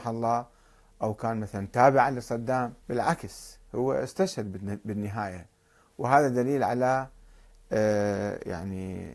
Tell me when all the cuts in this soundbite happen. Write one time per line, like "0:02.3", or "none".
0:02.8

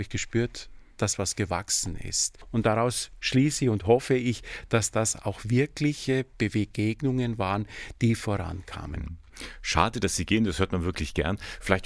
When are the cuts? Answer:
0:00.9

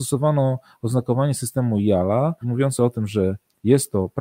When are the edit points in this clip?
0:02.4

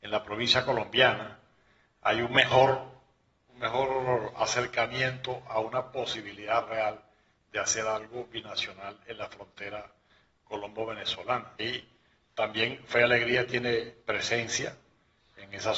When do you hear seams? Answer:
0:11.6

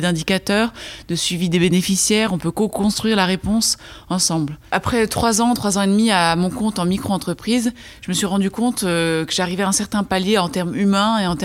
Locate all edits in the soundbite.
none

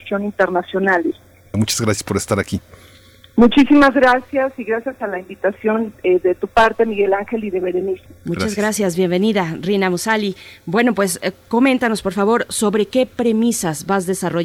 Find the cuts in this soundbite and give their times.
0:01.5
0:08.1

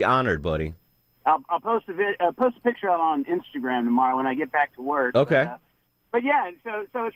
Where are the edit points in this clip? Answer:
none

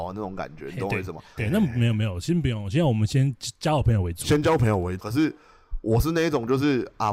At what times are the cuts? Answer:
0:01.4
0:05.0

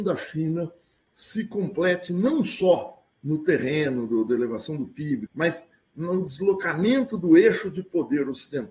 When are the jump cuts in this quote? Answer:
0:04.1
0:05.3

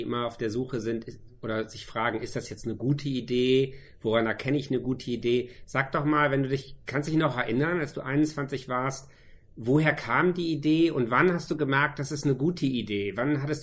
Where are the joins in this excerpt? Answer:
none

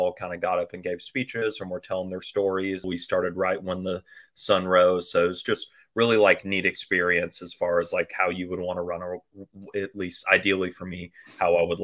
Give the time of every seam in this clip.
0:02.8

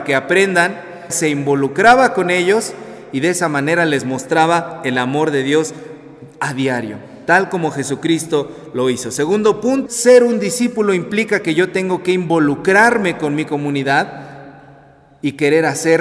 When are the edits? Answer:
0:01.1
0:09.9

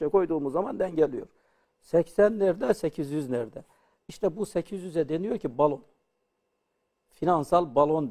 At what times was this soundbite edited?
0:01.6

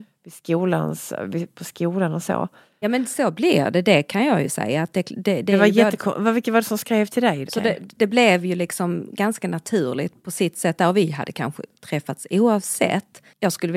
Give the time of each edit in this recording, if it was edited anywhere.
0:02.8
0:07.5

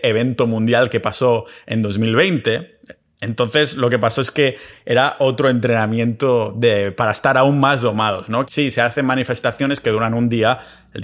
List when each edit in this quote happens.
0:08.5

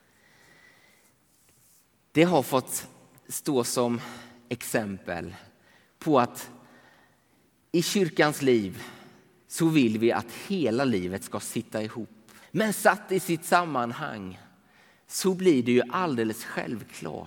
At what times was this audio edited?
0:12.4

